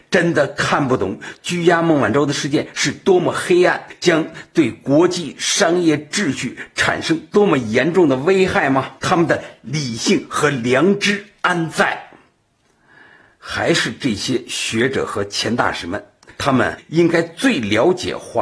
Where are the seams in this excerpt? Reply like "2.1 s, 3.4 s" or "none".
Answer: 9.0 s